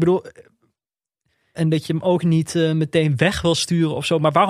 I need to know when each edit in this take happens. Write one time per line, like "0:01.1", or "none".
0:01.5